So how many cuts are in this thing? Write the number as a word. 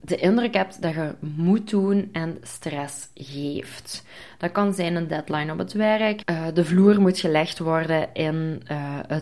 one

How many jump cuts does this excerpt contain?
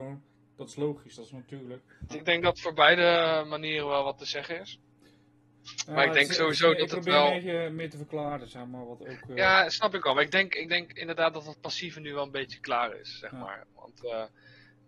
one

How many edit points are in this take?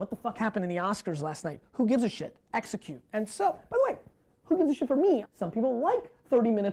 one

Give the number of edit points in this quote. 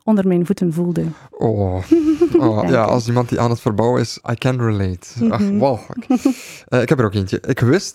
two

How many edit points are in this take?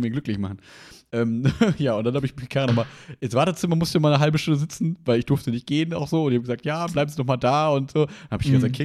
zero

